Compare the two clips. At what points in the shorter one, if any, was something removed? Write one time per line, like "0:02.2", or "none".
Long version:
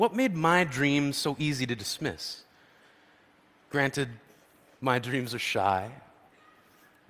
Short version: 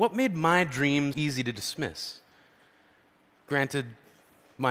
0:01.1